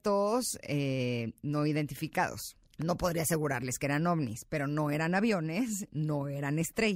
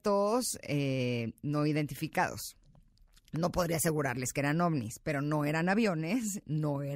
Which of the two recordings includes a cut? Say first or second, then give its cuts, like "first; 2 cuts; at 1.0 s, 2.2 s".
first; 1 cut; at 2.7 s